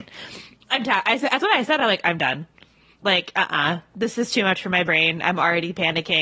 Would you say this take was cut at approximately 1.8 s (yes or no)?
no